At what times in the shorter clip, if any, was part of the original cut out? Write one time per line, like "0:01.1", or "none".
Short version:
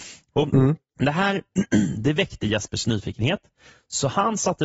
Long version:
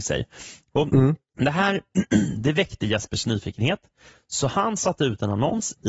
none